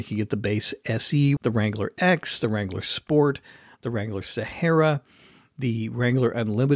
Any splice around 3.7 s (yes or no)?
no